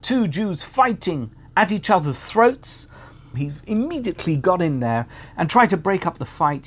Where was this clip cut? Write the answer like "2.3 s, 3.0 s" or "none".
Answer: 3.3 s